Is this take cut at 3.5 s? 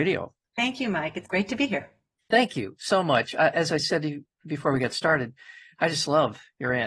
no; 1 cut; at 1.3 s

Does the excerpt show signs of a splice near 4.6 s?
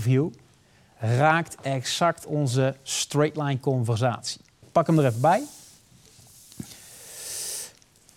yes; 1 cut; at 4.6 s

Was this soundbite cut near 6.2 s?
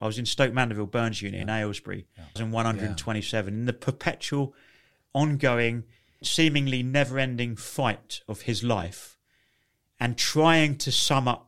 yes; 2 cuts; at 2.4 s, 6.2 s

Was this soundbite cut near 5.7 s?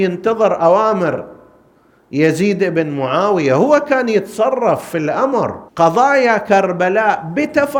yes; 1 cut; at 5.7 s

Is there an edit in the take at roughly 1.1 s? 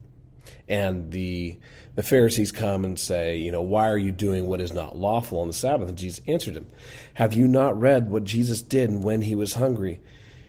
no; 0 cuts

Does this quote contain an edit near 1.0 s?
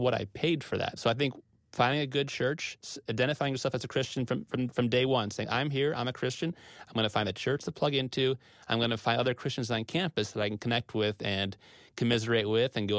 yes; 1 cut; at 1.0 s

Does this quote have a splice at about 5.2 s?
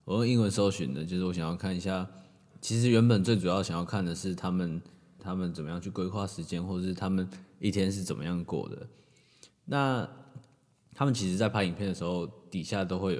yes; 1 cut; at 5.2 s

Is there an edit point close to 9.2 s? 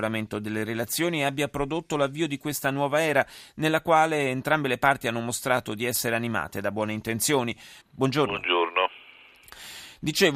no; 1 cut; at 7.8 s

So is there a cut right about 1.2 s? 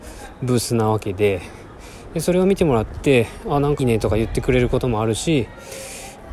no; 1 cut; at 3.8 s

